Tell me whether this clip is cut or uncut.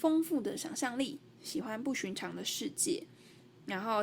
uncut